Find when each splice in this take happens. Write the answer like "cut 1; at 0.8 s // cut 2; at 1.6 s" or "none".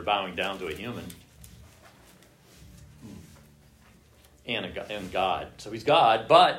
none